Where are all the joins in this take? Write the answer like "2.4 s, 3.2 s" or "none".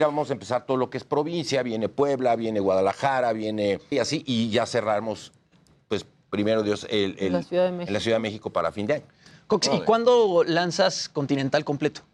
3.9 s